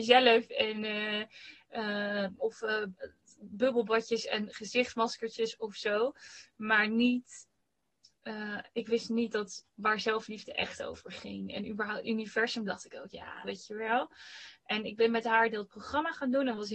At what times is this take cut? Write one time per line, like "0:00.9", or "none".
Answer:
0:02.4
0:13.4